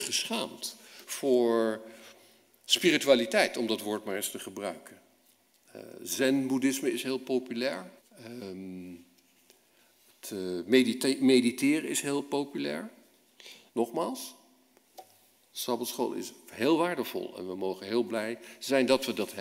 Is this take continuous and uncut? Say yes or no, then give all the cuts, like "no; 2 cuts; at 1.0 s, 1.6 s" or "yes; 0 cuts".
no; 2 cuts; at 8.0 s, 13.7 s